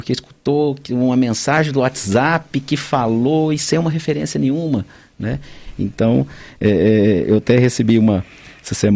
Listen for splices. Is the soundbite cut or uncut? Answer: uncut